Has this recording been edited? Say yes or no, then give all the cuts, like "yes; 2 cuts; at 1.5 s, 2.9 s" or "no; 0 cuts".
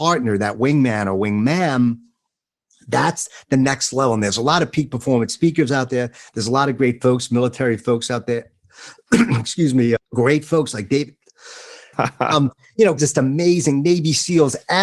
yes; 3 cuts; at 10.0 s, 11.9 s, 13.0 s